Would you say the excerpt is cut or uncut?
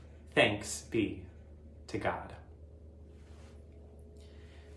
uncut